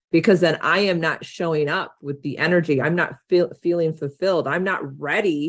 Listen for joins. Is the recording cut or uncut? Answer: uncut